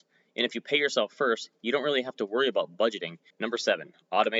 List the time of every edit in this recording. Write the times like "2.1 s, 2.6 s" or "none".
3.3 s